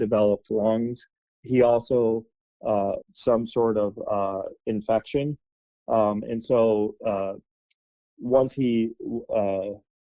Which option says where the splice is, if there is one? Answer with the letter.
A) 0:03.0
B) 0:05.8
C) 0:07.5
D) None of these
A